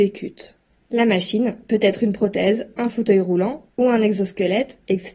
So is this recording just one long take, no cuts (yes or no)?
yes